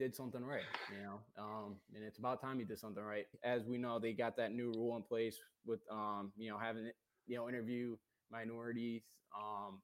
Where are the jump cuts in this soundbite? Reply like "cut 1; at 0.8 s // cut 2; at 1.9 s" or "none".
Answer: cut 1; at 3.3 s